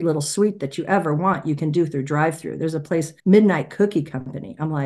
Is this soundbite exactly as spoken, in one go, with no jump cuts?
no; 1 cut; at 3.2 s

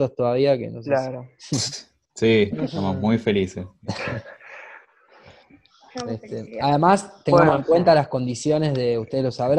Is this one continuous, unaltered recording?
yes; 0 cuts

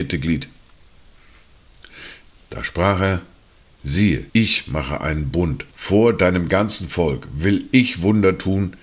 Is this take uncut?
no; 3 cuts; at 2.3 s, 4.3 s, 5.7 s

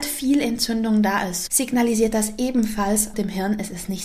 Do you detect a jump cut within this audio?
yes; 2 cuts; at 1.5 s, 3.1 s

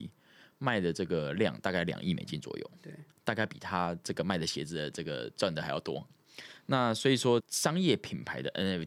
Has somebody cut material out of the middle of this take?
yes; 2 cuts; at 6.1 s, 7.4 s

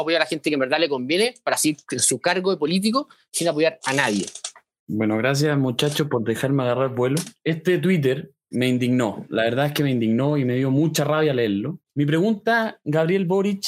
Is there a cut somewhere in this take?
yes; 2 cuts; at 8.5 s, 11.9 s

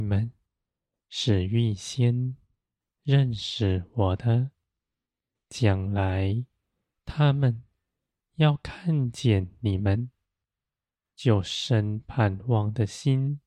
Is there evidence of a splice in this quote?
no; 0 cuts

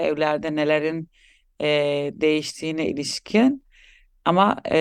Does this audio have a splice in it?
no; 0 cuts

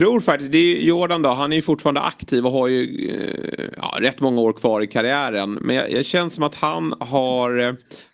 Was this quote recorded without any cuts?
yes; 0 cuts

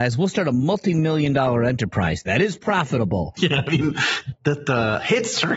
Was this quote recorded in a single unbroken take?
no; 1 cut; at 3.4 s

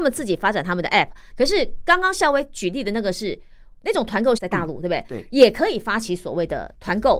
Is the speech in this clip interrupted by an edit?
yes; 2 cuts; at 1.3 s, 4.4 s

